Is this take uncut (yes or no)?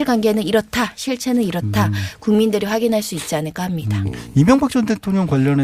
yes